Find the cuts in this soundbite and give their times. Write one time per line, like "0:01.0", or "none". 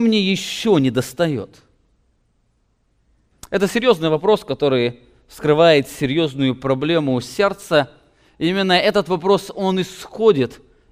none